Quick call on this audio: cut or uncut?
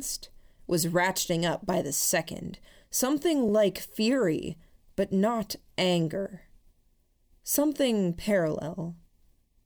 uncut